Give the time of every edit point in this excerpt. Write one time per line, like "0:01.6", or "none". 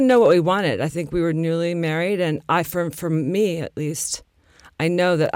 none